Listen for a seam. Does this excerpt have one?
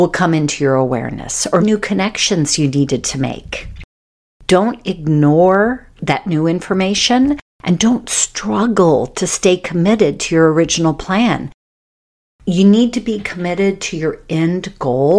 yes; 1 cut; at 1.6 s

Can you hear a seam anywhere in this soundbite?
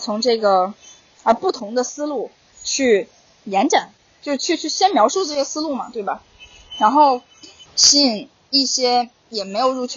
yes; 1 cut; at 7.7 s

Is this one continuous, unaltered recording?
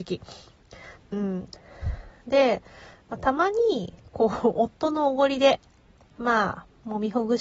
no; 1 cut; at 1.0 s

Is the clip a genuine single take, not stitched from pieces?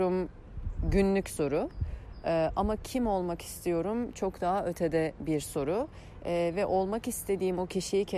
yes; 0 cuts

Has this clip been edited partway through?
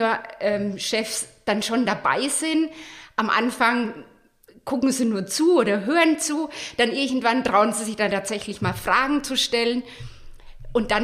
no; 0 cuts

